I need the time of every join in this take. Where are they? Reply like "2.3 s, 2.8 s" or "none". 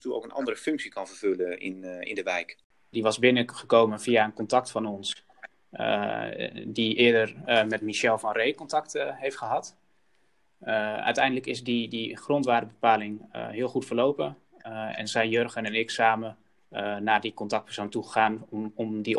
2.9 s